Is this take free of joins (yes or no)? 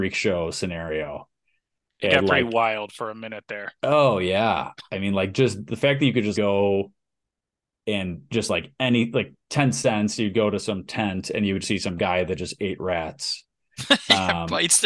no